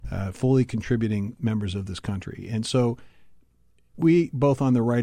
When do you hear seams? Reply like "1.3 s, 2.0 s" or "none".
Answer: 3.9 s